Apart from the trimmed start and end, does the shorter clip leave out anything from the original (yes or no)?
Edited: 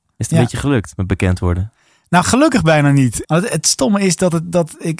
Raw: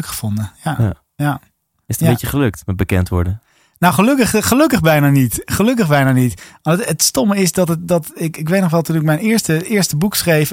yes